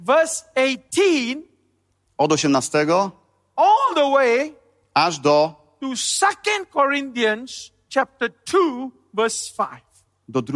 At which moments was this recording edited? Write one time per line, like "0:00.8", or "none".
none